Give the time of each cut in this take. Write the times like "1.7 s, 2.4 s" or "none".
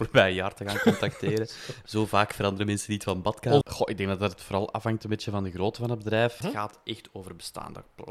3.6 s, 6.4 s